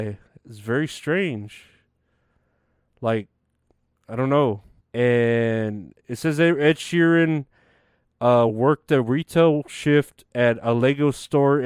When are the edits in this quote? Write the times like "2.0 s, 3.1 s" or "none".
4.8 s, 8.5 s